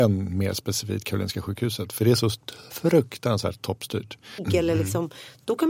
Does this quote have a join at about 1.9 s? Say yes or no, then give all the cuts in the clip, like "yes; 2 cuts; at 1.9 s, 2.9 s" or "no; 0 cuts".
no; 1 cut; at 4.4 s